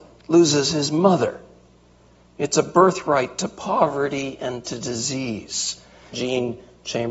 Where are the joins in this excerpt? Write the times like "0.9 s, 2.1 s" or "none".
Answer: 6.1 s